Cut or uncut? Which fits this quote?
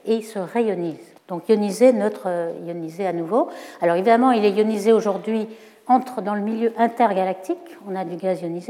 cut